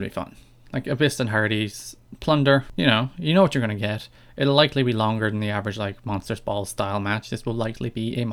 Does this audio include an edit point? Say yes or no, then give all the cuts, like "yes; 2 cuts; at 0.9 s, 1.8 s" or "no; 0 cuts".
no; 0 cuts